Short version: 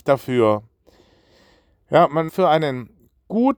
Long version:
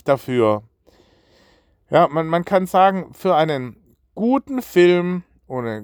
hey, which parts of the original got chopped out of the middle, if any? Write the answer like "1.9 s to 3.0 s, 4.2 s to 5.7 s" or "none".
2.3 s to 3.1 s